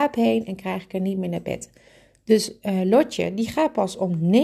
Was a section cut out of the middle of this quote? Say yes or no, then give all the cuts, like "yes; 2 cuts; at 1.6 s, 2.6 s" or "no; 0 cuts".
no; 0 cuts